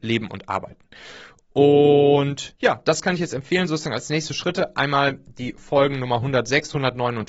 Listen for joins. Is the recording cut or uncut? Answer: uncut